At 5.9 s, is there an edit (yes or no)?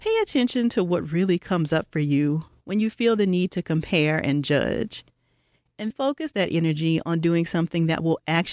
yes